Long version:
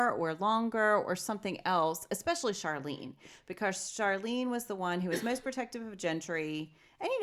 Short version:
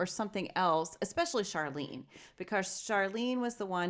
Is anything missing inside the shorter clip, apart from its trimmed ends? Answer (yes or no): no